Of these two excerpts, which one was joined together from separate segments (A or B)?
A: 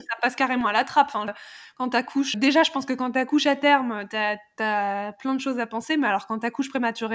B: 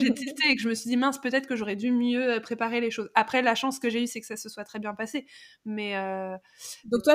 A